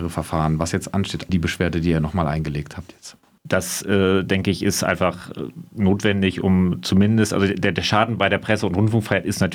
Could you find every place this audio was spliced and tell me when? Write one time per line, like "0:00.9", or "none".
0:01.3
0:03.4

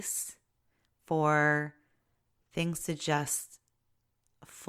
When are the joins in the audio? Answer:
none

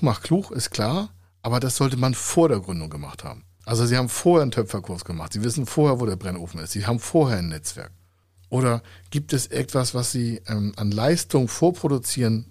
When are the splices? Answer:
0:08.4

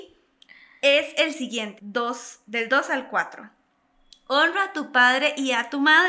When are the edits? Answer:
0:01.8

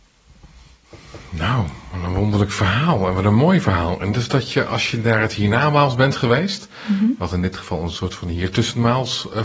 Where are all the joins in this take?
none

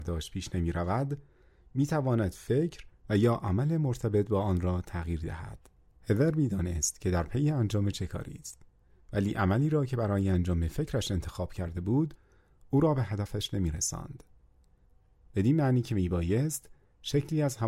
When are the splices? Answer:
0:15.2

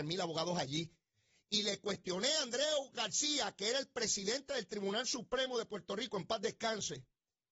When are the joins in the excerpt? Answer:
none

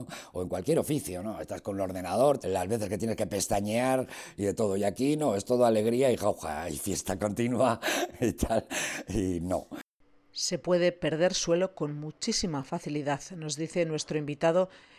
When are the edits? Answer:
0:02.4

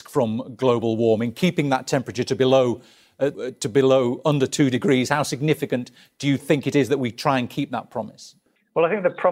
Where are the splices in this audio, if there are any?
0:03.3

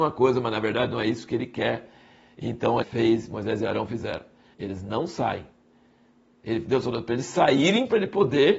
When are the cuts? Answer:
0:02.8
0:04.5

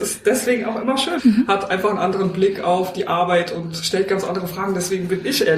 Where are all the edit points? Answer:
0:01.2

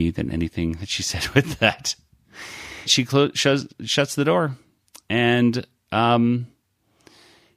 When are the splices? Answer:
0:02.9

